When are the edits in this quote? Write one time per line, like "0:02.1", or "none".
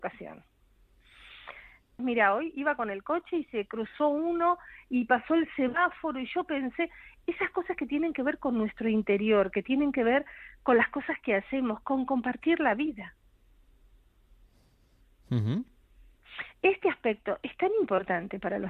0:02.0